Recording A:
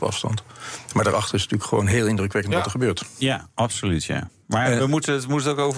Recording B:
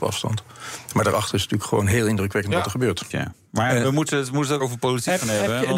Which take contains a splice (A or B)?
B